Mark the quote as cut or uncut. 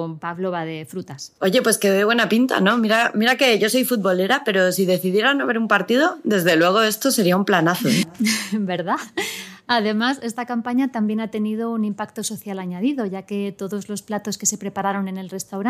uncut